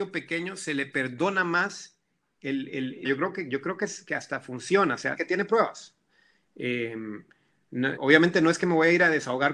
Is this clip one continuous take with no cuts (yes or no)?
no